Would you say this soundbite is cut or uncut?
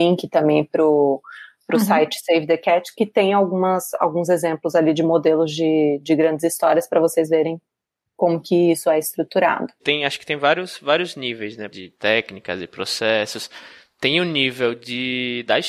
cut